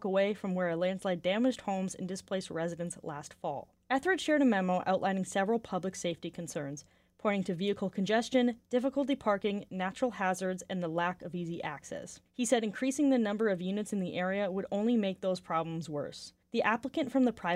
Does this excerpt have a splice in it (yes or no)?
yes